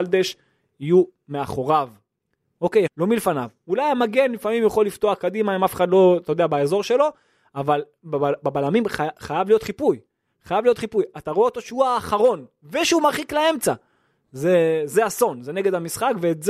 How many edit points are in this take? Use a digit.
1